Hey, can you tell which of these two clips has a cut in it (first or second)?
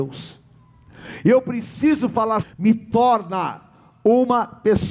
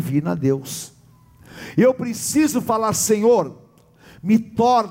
first